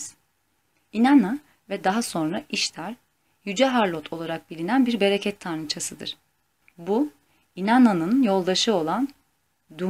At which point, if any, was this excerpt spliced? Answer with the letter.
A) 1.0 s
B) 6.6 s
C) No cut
B